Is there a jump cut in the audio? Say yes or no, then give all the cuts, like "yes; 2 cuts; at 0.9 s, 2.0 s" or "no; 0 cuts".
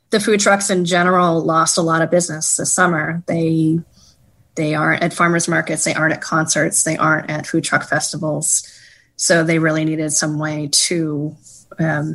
no; 0 cuts